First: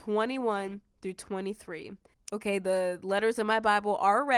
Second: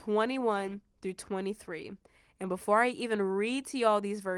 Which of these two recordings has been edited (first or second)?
first